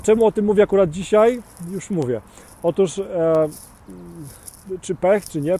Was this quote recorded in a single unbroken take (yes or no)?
yes